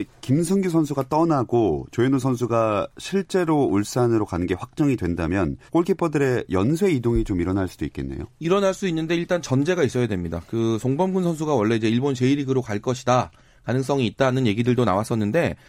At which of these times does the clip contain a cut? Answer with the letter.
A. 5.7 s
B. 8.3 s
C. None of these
A